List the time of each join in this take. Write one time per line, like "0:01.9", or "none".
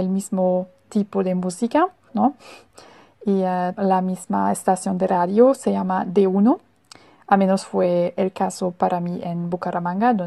0:02.1
0:03.7